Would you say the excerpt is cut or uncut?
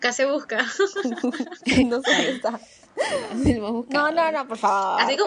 uncut